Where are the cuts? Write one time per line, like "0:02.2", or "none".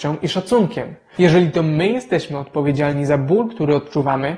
0:01.2